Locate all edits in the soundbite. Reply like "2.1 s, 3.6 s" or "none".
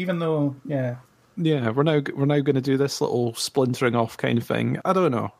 none